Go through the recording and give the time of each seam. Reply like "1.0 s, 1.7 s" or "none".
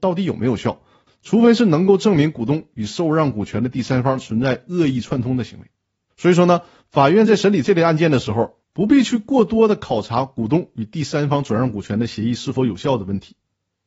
1.1 s, 6.1 s, 8.7 s